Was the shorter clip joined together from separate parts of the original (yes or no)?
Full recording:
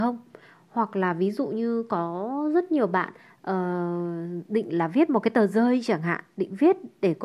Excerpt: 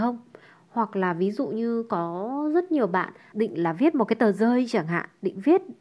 yes